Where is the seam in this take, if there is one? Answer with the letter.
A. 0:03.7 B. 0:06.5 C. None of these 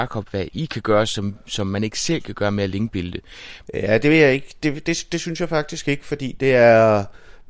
A